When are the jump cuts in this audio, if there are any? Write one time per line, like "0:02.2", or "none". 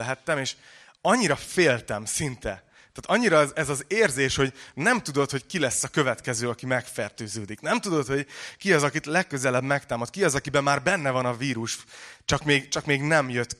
none